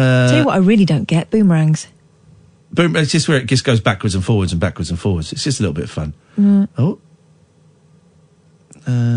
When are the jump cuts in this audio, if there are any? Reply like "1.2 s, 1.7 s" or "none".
2.6 s